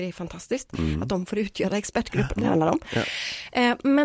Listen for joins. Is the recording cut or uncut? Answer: cut